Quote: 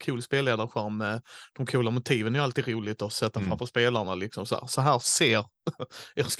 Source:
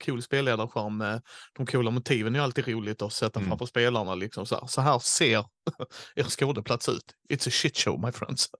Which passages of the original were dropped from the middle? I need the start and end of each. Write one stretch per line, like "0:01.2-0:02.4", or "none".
none